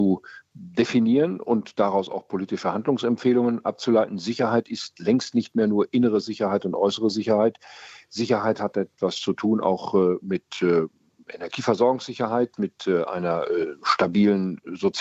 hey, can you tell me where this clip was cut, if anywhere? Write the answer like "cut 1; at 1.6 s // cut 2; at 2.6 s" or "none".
none